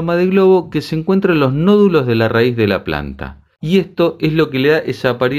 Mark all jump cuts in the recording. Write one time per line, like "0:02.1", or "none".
0:03.6